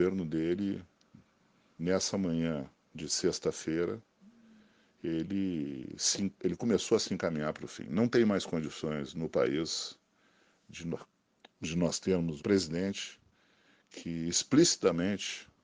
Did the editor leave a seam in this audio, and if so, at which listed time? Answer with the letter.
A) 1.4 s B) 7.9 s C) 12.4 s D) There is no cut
C